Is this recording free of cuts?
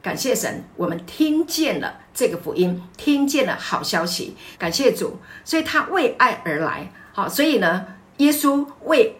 no; 2 cuts; at 4.5 s, 7.1 s

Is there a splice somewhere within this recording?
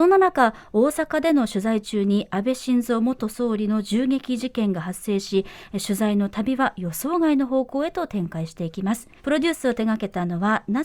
yes; 1 cut; at 9.2 s

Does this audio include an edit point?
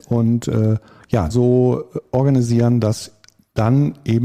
yes; 1 cut; at 1.3 s

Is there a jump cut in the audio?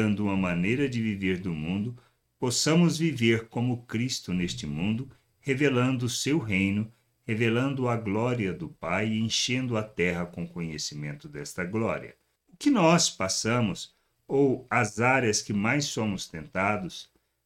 no; 0 cuts

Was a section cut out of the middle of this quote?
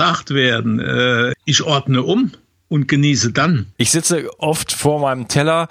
yes; 2 cuts; at 1.3 s, 3.8 s

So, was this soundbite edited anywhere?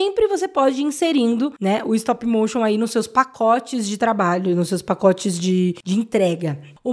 no; 0 cuts

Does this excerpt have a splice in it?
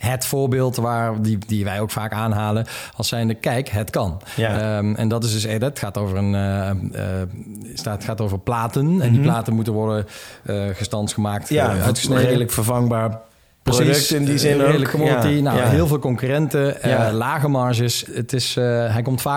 yes; 1 cut; at 18.1 s

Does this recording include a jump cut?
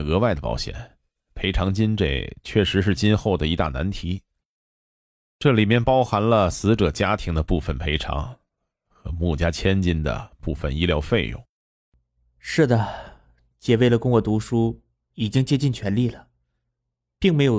no; 0 cuts

